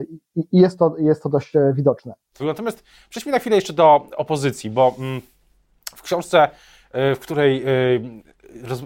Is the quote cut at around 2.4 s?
yes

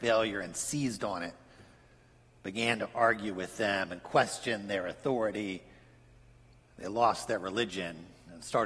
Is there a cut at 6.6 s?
yes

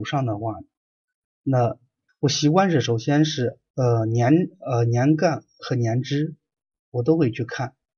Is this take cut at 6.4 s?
no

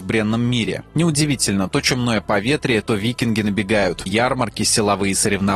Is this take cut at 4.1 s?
yes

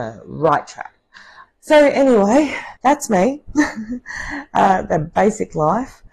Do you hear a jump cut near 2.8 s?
yes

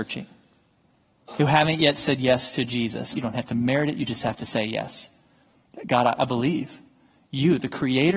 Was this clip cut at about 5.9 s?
no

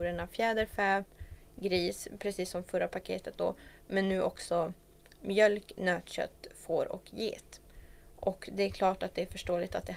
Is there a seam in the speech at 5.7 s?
no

